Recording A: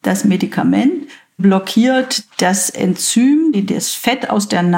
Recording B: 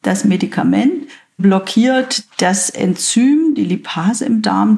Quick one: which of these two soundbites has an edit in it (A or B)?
A